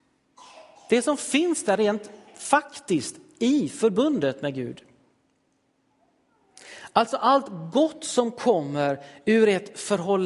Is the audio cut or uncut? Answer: uncut